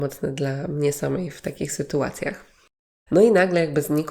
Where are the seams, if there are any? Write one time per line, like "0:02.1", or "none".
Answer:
0:03.1